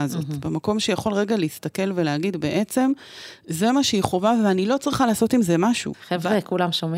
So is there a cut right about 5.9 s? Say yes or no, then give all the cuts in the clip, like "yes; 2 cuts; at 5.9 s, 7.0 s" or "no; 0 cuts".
yes; 1 cut; at 5.9 s